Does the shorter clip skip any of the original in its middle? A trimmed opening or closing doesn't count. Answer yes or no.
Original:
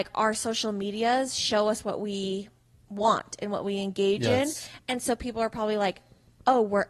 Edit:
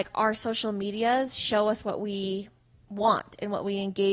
no